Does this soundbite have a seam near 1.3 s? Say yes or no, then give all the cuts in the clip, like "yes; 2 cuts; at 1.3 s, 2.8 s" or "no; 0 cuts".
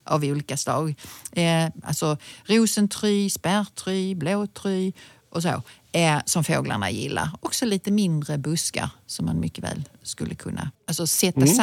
no; 0 cuts